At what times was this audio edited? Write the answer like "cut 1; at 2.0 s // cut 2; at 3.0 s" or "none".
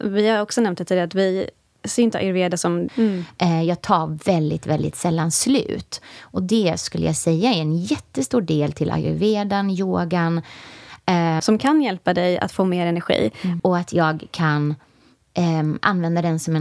cut 1; at 2.9 s // cut 2; at 11.4 s // cut 3; at 13.6 s